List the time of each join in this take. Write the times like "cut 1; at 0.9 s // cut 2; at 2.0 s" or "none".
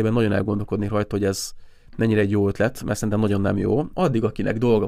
cut 1; at 3.9 s